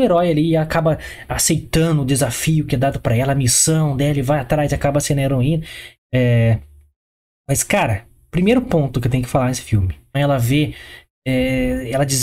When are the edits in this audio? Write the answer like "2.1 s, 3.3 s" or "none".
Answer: 6.0 s, 10.1 s